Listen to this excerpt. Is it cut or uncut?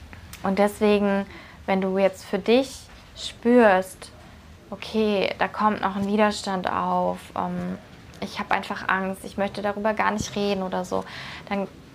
uncut